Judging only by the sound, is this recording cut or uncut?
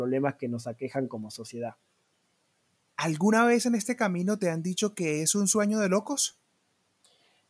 uncut